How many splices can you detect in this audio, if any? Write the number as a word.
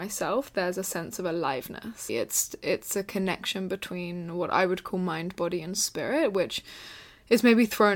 one